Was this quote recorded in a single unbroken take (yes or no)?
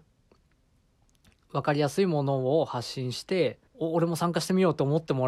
no